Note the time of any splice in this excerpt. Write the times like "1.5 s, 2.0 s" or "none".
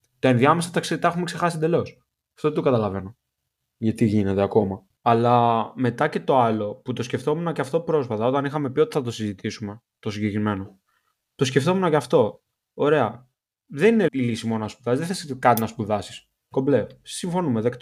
14.1 s